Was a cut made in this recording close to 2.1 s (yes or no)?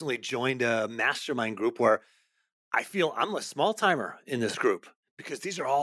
no